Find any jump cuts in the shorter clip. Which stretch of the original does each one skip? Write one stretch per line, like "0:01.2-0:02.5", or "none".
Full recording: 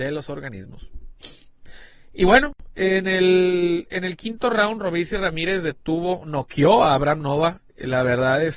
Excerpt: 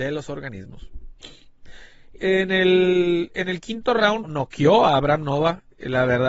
0:02.2-0:02.7
0:04.8-0:06.2